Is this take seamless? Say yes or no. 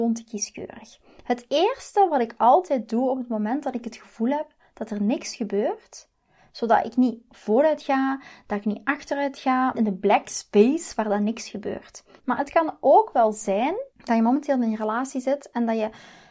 no